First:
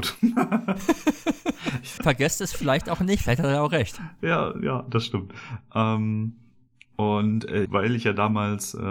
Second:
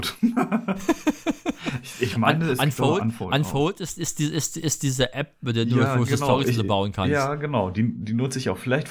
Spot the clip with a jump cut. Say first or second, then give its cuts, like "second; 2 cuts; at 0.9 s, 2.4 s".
first; 2 cuts; at 2.0 s, 7.7 s